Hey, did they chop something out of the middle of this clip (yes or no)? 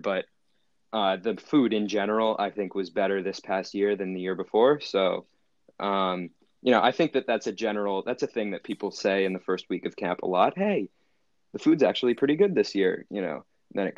no